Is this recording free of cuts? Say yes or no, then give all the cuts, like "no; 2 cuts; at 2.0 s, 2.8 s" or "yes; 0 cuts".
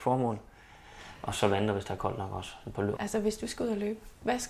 no; 1 cut; at 2.9 s